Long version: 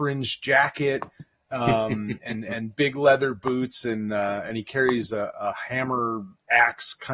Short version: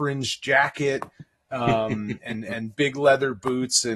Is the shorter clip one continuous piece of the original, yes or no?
yes